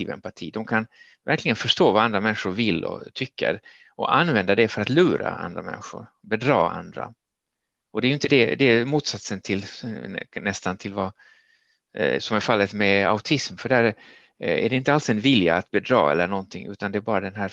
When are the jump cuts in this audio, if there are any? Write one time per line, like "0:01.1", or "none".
none